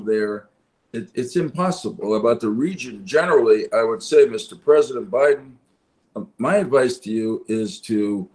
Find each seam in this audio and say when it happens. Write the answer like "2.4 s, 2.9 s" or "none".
2.0 s

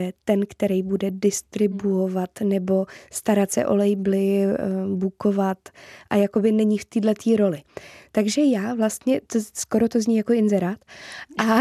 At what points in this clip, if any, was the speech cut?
none

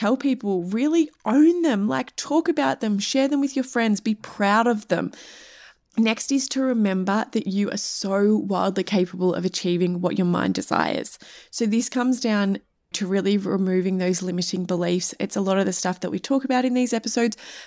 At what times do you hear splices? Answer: none

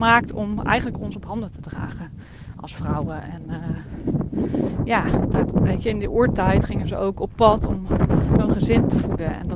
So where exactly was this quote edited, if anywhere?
none

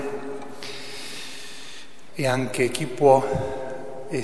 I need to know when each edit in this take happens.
2.1 s

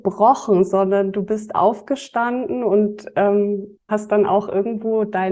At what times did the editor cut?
3.9 s

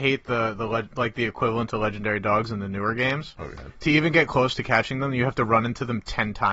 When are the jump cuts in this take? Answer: none

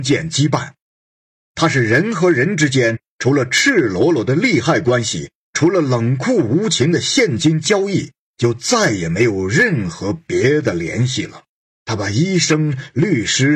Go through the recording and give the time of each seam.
11.7 s

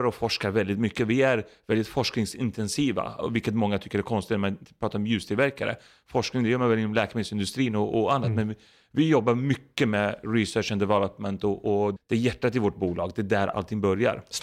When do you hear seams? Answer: 12.0 s

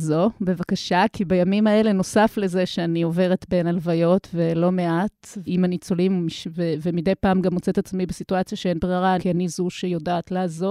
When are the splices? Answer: 5.5 s, 9.2 s

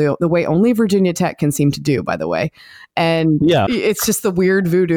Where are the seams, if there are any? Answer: 3.7 s

